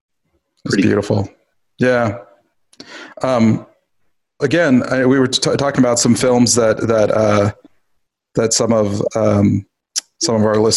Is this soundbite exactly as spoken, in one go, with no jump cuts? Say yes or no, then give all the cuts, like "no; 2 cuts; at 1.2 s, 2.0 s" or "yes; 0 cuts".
no; 1 cut; at 4.4 s